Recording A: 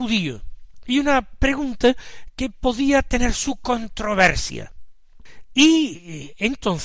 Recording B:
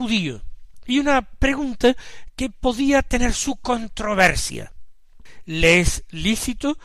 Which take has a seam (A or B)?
A